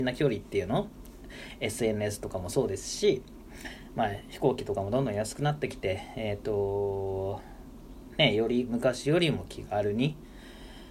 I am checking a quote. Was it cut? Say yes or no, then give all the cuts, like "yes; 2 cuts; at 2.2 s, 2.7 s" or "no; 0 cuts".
no; 0 cuts